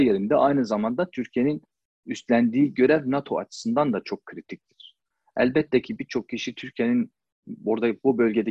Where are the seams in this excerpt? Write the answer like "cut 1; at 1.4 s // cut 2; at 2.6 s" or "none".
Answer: none